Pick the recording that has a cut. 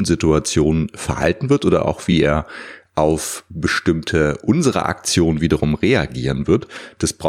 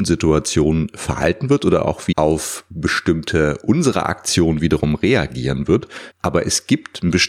second; 2 cuts; at 2.1 s, 6.1 s

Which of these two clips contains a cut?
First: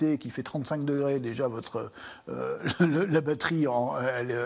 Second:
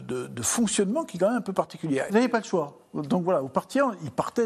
second; 1 cut; at 2.1 s

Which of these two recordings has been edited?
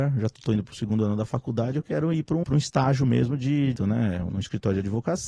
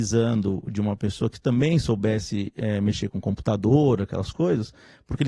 first; 2 cuts; at 2.4 s, 3.8 s

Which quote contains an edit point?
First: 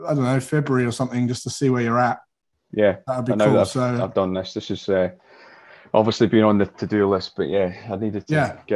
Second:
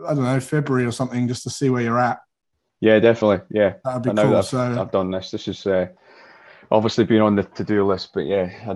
first; 1 cut; at 2.7 s

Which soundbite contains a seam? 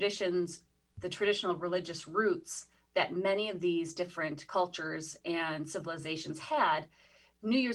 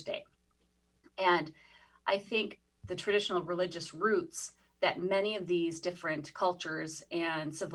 second; 1 cut; at 2.7 s

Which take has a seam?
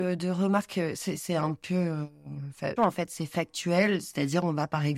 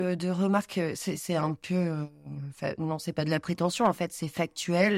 first; 1 cut; at 2.8 s

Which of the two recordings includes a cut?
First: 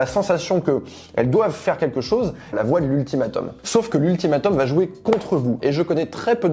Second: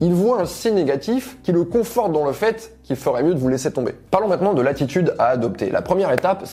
first; 2 cuts; at 2.5 s, 5.6 s

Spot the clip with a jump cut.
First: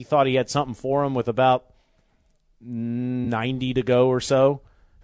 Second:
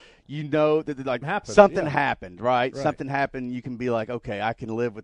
second; 1 cut; at 1.2 s

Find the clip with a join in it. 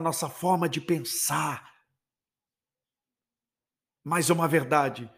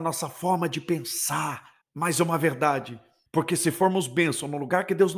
second; 2 cuts; at 1.8 s, 3.3 s

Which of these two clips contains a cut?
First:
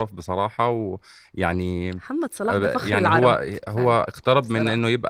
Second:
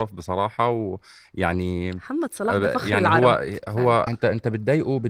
second; 1 cut; at 4.1 s

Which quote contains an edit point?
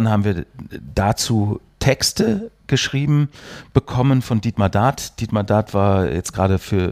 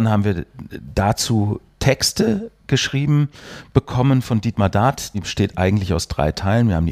second; 1 cut; at 5.1 s

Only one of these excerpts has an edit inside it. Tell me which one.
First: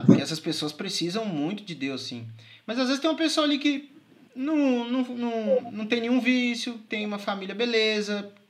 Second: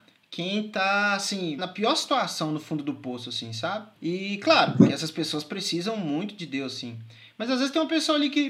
second; 2 cuts; at 1.6 s, 3.9 s

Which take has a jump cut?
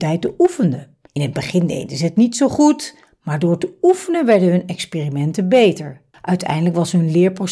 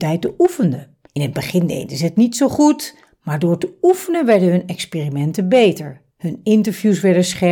first; 1 cut; at 6.1 s

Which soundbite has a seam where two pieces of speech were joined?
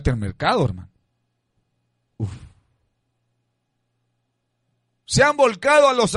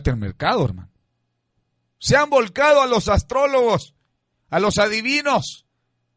second; 1 cut; at 1.9 s

